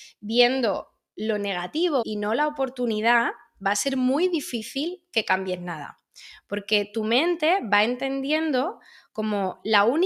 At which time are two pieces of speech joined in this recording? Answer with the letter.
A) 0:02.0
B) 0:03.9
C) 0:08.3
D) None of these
A